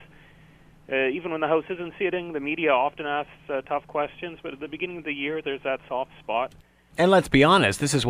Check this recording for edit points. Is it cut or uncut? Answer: cut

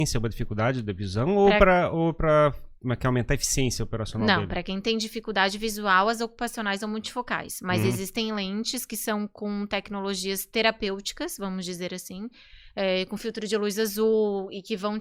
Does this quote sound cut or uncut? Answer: uncut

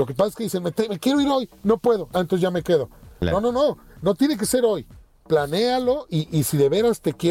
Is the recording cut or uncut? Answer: uncut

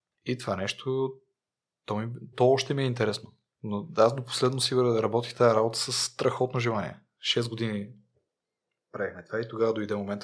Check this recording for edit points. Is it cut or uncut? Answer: cut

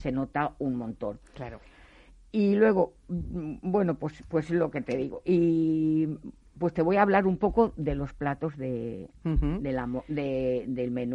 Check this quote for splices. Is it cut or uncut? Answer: uncut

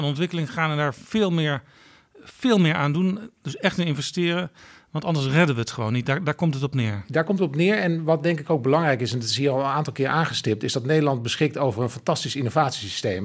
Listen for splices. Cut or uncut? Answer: uncut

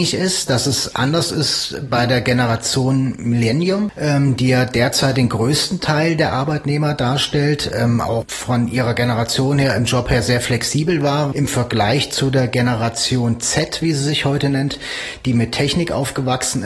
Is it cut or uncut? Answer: cut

